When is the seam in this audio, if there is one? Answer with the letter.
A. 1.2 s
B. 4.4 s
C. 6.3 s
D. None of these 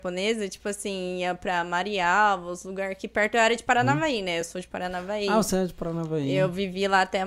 D